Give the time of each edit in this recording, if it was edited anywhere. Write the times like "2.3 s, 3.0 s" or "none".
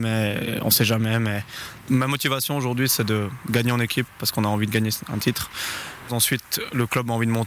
6.1 s